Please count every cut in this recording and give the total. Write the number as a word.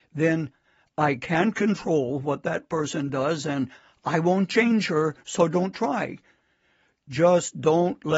zero